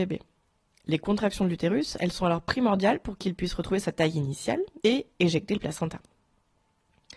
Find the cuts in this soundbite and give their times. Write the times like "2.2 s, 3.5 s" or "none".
4.8 s